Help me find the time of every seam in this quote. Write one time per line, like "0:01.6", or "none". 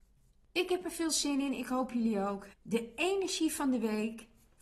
0:02.5